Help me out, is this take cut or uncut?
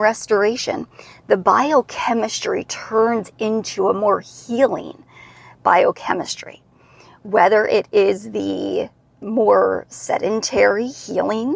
uncut